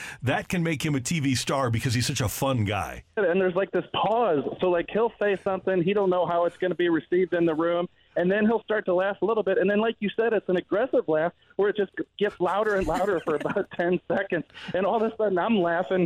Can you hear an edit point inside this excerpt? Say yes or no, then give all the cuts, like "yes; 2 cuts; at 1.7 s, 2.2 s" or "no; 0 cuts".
yes; 1 cut; at 3.2 s